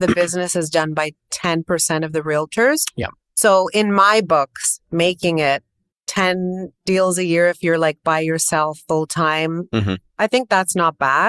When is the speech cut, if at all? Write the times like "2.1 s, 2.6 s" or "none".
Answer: 5.9 s

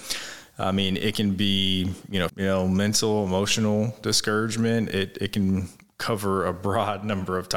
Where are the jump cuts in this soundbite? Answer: 2.3 s

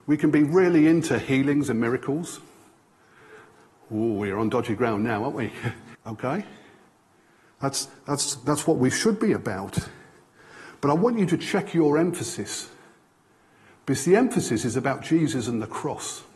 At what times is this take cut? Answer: 5.9 s

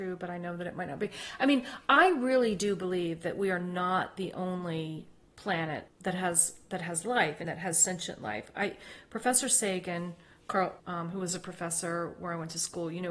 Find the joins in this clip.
7.4 s, 10.8 s

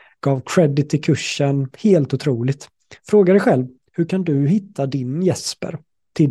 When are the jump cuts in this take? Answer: none

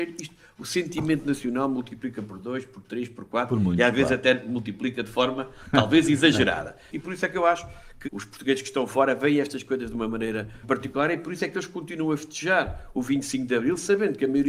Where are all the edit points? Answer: 6.9 s, 8.0 s, 10.6 s

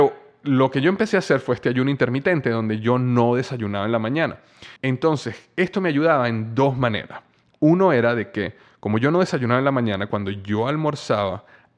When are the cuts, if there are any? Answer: 4.8 s

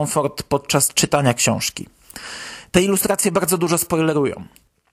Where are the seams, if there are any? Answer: none

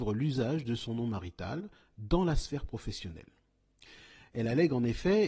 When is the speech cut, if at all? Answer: none

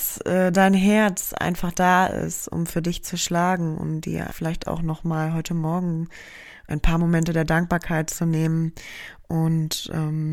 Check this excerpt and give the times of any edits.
4.3 s, 6.7 s

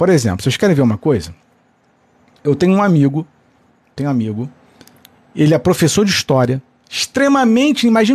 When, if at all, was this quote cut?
none

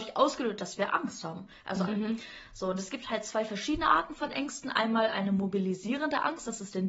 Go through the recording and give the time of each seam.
1.9 s

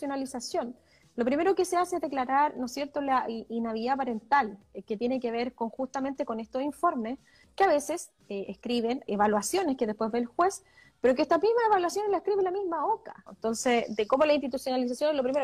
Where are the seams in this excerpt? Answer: 9.1 s, 13.3 s

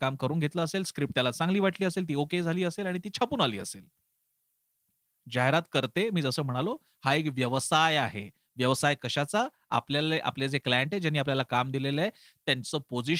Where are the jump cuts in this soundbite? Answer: none

